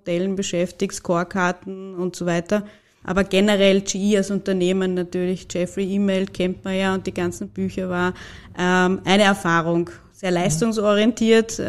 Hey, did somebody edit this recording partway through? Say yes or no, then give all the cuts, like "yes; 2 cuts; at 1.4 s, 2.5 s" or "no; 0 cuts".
yes; 1 cut; at 3.0 s